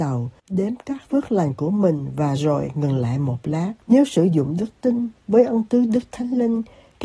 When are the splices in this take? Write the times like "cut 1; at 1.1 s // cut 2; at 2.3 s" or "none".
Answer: cut 1; at 3.8 s